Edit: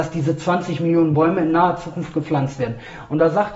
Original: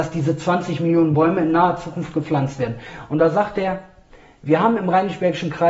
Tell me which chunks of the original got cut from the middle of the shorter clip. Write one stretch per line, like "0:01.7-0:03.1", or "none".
none